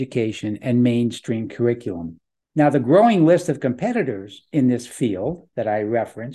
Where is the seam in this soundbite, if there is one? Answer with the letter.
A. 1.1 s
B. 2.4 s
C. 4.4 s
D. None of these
B